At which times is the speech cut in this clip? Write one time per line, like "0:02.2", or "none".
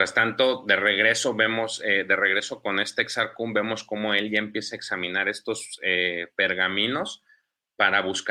none